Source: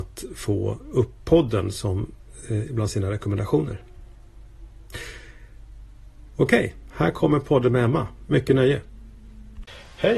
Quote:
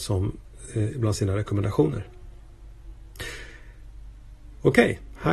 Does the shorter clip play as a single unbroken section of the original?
yes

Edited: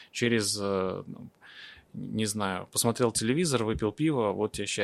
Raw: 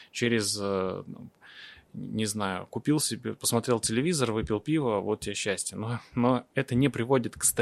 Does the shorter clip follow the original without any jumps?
no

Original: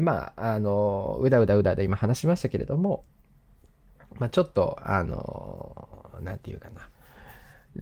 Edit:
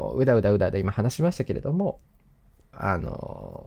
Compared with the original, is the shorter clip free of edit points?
no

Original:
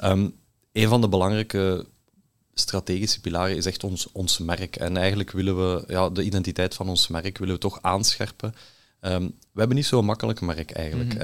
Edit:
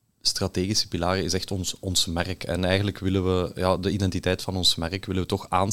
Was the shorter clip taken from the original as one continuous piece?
yes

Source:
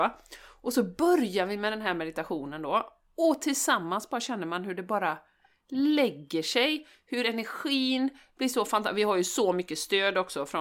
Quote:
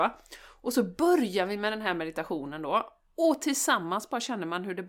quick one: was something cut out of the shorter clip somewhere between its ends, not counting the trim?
no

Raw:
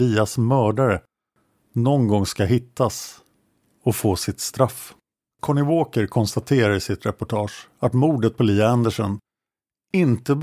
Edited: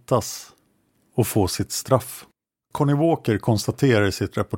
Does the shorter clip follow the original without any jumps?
yes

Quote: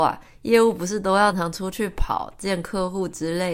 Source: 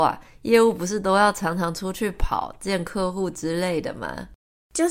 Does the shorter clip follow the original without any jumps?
no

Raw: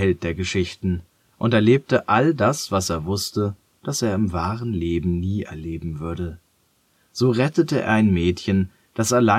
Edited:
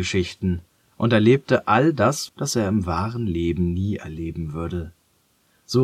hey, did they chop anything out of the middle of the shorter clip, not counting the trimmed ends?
yes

